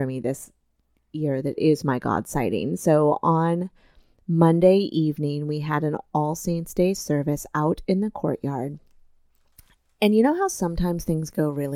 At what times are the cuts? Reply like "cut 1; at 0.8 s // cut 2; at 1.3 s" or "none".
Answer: none